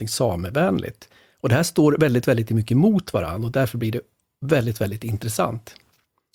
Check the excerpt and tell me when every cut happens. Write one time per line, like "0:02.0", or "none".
none